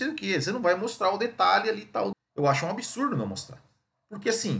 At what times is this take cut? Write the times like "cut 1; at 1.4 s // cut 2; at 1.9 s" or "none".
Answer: cut 1; at 2.1 s